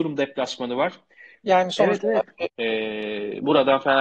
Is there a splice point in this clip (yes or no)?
yes